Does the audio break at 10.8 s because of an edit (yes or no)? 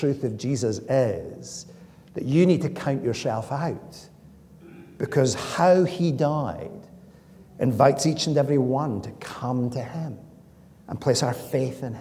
no